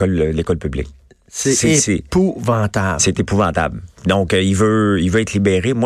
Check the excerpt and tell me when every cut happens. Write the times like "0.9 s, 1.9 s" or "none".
none

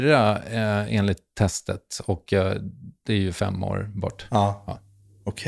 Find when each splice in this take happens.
none

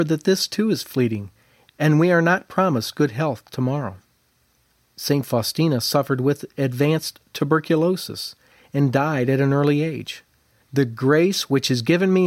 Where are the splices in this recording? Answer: 10.6 s

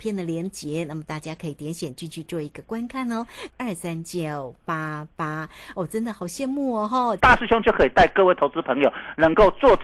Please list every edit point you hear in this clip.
3.5 s, 5.7 s, 7.2 s

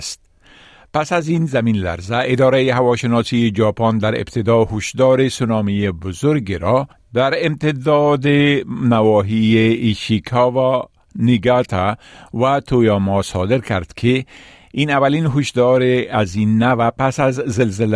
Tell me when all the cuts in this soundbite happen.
none

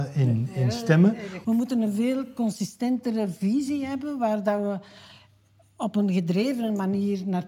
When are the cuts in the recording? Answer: 1.4 s

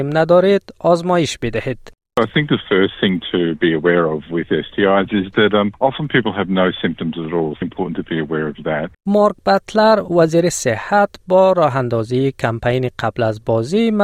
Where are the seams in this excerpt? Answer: 7.6 s, 8.9 s

